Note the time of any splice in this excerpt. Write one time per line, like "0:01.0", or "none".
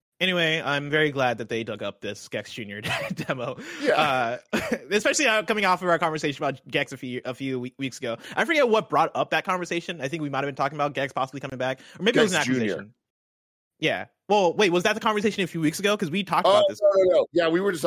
none